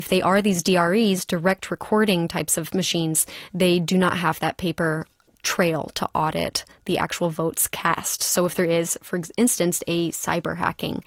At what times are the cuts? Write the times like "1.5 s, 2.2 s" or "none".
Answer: none